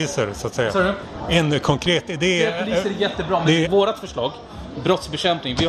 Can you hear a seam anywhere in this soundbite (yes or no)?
yes